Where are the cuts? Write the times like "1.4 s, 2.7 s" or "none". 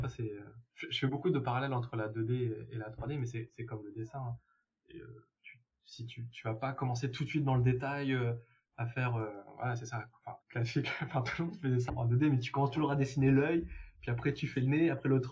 10.4 s, 11.9 s